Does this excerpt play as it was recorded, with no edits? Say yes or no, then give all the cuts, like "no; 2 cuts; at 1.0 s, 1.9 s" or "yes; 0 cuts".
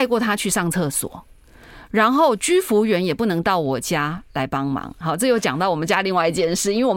yes; 0 cuts